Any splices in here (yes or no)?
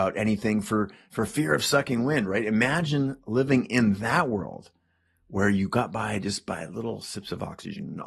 no